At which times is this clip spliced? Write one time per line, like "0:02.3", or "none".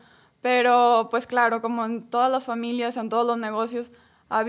none